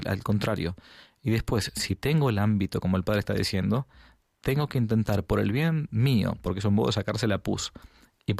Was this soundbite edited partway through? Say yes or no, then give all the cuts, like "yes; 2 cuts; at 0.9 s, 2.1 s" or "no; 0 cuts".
no; 0 cuts